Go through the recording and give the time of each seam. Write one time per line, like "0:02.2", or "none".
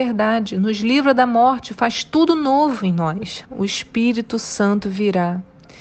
0:03.4